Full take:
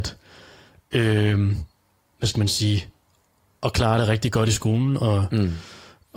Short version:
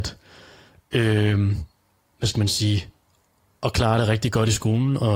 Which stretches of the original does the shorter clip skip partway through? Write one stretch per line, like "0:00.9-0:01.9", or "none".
none